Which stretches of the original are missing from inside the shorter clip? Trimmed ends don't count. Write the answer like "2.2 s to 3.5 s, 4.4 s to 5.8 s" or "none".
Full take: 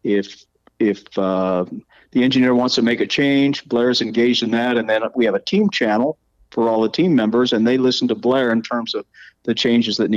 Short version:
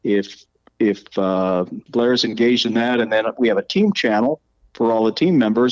1.9 s to 3.6 s